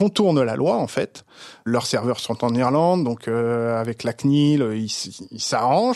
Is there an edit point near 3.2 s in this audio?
no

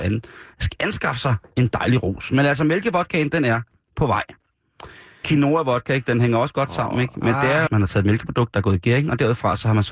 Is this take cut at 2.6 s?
no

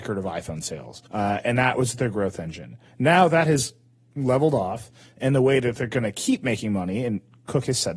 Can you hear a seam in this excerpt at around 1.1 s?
yes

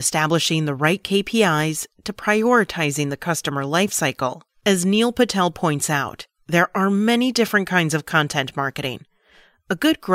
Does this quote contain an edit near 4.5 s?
yes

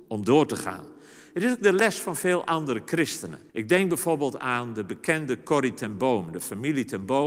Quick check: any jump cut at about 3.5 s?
yes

